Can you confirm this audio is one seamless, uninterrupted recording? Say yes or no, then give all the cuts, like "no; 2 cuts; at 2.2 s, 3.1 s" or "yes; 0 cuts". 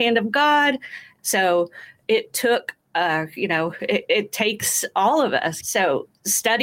no; 2 cuts; at 1.2 s, 5.6 s